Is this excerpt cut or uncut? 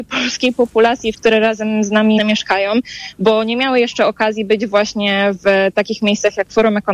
cut